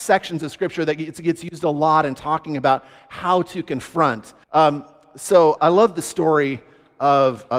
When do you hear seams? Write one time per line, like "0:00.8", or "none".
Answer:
0:04.4
0:05.6